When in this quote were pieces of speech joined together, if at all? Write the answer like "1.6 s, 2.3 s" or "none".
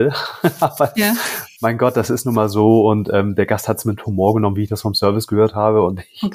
none